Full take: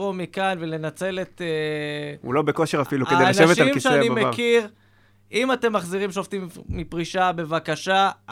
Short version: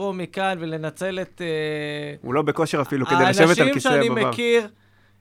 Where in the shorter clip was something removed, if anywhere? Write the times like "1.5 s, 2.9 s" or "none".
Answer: none